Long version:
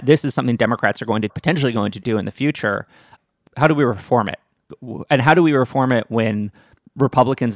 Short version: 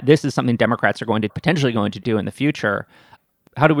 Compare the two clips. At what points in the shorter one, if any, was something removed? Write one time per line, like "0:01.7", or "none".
none